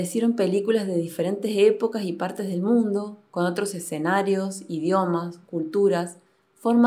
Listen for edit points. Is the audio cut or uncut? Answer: uncut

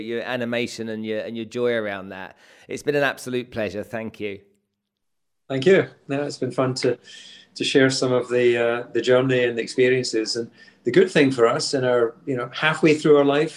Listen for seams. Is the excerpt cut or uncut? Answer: uncut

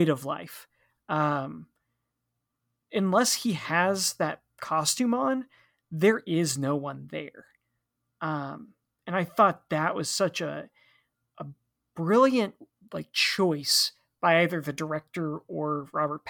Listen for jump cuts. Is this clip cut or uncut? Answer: uncut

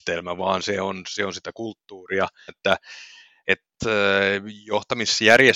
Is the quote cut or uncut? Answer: cut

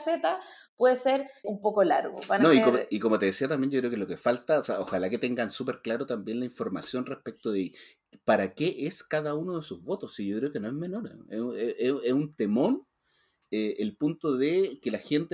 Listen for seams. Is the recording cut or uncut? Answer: cut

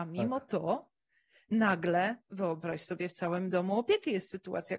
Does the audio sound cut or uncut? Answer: uncut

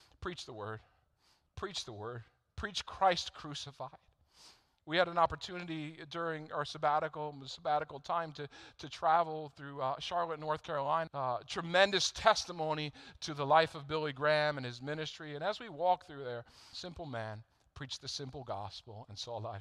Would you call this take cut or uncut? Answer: cut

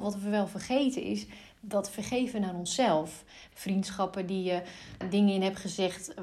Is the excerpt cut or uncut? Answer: cut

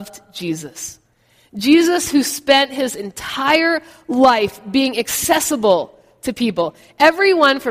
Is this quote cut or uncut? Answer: uncut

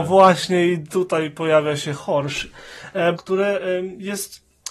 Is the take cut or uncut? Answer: cut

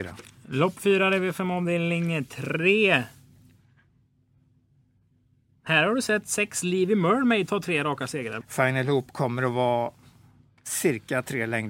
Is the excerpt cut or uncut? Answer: cut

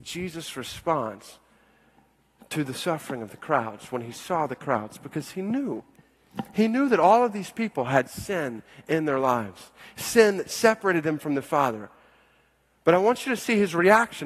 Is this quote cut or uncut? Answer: uncut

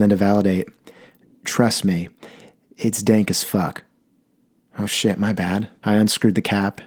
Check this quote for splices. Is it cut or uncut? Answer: cut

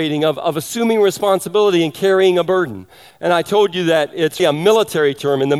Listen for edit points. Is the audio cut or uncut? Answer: cut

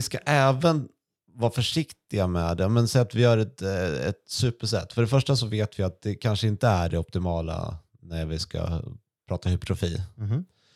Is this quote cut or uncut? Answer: uncut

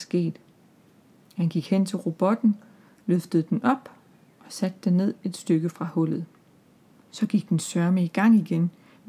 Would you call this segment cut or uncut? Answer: cut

